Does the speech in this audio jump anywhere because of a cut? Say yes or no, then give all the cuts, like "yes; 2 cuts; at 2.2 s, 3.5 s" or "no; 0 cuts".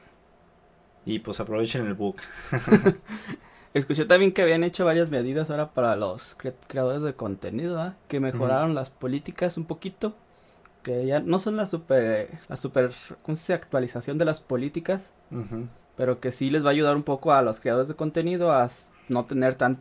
yes; 1 cut; at 12.4 s